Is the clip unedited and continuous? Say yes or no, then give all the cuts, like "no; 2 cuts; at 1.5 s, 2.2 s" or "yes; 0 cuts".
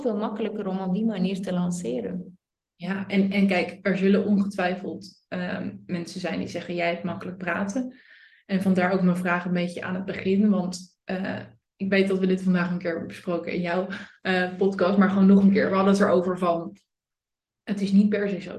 yes; 0 cuts